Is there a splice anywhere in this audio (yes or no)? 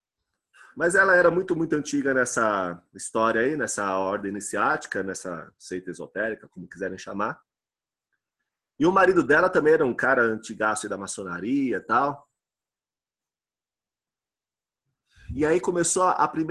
no